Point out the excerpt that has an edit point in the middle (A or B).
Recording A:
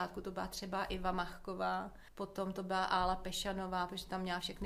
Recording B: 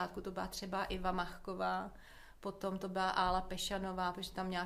A